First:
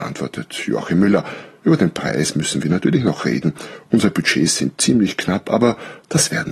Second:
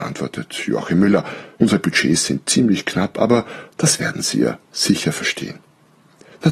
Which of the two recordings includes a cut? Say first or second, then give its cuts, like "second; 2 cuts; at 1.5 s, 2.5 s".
second; 1 cut; at 1.5 s